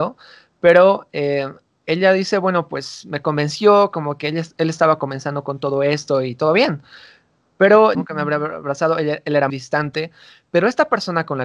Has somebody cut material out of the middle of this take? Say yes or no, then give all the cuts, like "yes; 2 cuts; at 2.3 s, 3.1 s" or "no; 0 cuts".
yes; 2 cuts; at 7.9 s, 9.5 s